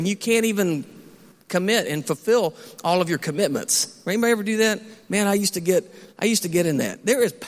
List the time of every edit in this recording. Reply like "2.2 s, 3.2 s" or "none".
none